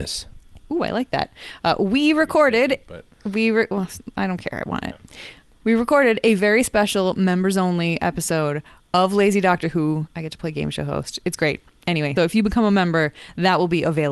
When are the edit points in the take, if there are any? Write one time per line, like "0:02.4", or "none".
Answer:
0:10.1
0:12.2